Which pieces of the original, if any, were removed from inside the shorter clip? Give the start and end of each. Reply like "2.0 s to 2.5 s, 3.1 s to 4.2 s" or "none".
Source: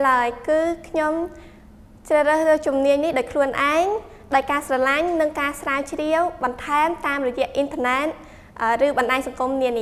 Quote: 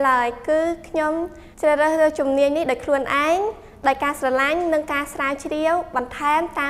1.5 s to 2.0 s